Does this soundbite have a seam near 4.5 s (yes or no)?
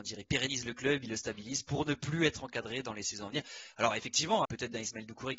yes